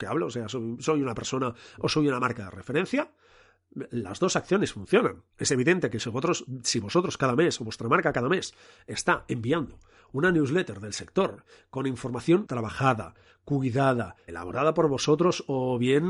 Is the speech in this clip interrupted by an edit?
yes; 3 cuts; at 5.3 s, 12.5 s, 14.3 s

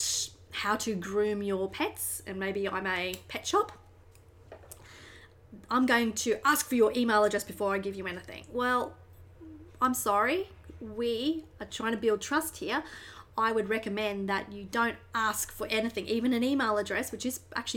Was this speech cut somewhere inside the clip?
no; 0 cuts

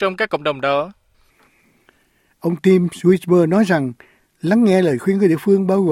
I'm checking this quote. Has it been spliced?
no; 0 cuts

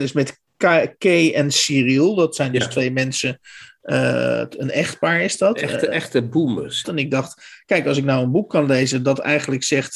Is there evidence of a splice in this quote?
yes; 1 cut; at 6.8 s

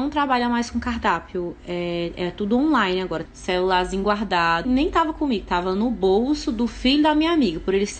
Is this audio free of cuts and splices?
no; 2 cuts; at 3.3 s, 4.6 s

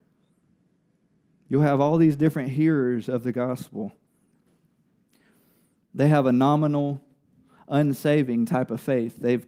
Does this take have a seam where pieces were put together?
no; 0 cuts

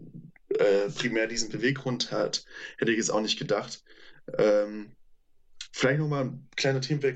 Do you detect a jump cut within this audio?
no; 0 cuts

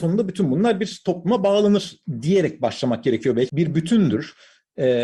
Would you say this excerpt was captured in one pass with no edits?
no; 1 cut; at 3.5 s

